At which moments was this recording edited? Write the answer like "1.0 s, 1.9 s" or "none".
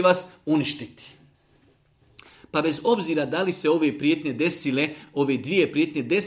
none